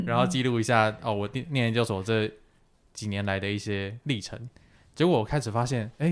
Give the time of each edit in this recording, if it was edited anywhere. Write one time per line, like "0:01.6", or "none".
none